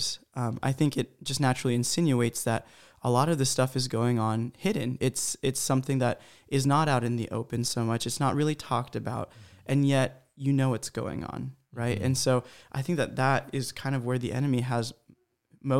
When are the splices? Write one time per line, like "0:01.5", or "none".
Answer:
none

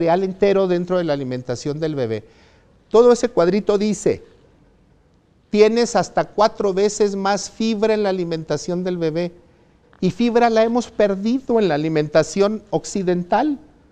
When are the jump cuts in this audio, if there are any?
none

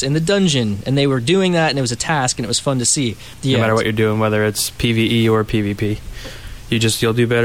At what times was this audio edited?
0:03.3

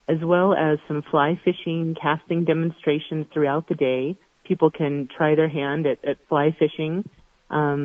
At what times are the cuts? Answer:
none

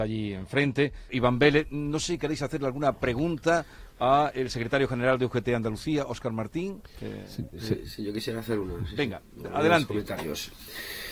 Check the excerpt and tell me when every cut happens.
0:01.1
0:07.5

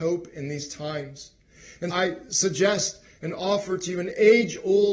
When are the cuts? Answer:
0:01.9

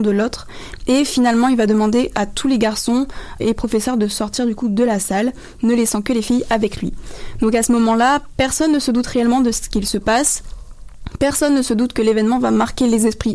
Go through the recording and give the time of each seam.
0:03.4

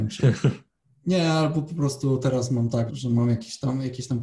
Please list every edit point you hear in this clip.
0:02.9

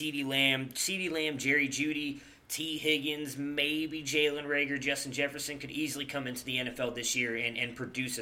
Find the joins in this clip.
none

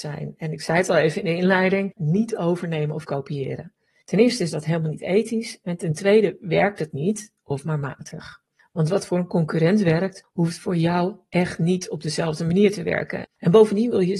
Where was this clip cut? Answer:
0:02.0
0:13.2

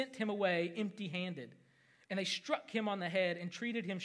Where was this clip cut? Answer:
0:02.1

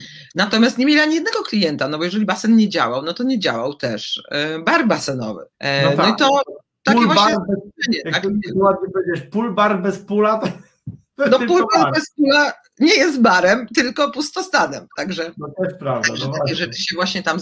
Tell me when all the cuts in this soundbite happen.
0:05.5

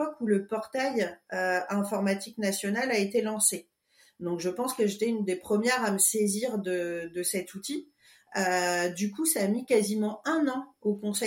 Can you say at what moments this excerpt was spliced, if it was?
none

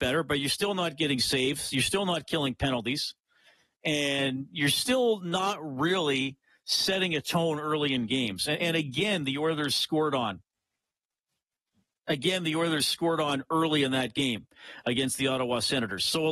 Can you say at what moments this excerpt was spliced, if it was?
none

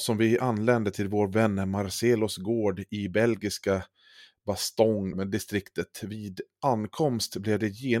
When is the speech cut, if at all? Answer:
0:05.1

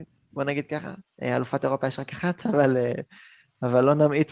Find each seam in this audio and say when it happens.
none

